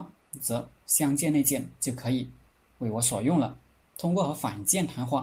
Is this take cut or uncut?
cut